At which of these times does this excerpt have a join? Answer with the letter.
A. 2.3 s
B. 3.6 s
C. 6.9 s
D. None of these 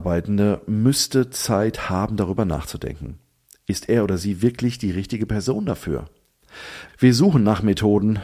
C